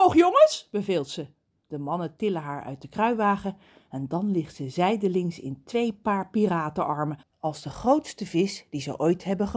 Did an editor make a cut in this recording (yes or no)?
no